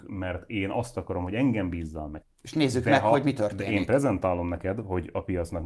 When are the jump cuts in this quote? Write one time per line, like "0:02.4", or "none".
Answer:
0:02.2